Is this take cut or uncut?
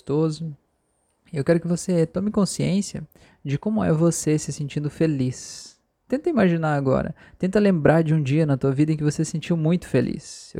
uncut